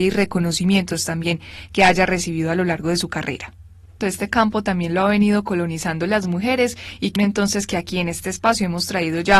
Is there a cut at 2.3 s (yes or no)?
no